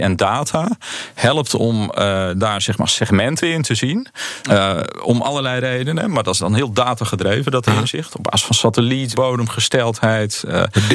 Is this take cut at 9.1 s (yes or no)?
yes